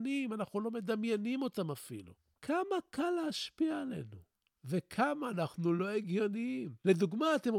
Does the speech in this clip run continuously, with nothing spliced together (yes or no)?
yes